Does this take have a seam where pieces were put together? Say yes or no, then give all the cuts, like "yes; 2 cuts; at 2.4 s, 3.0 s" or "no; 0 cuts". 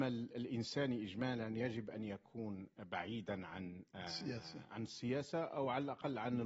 yes; 1 cut; at 4.7 s